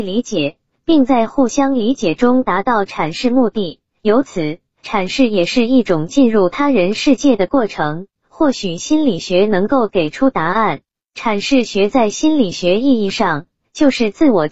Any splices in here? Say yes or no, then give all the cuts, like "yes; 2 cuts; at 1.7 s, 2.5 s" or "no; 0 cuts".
yes; 1 cut; at 8.2 s